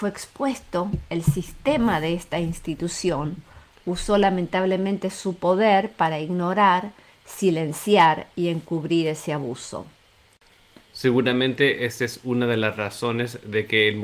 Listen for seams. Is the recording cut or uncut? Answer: uncut